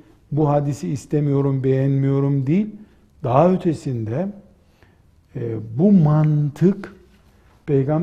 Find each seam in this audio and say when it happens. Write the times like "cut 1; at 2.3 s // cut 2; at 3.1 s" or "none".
none